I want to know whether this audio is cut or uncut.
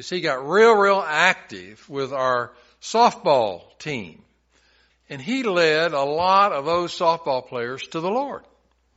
cut